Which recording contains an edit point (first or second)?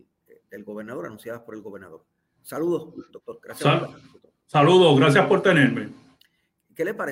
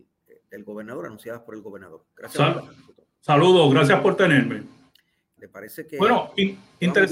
second